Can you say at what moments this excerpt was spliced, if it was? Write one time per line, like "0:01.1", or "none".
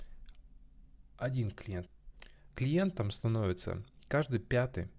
0:02.5